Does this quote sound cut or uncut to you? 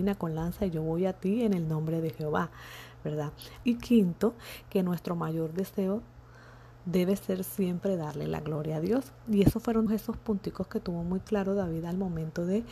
cut